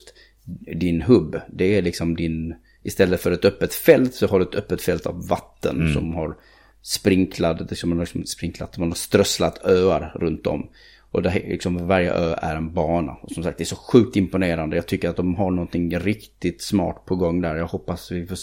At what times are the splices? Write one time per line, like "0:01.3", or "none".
none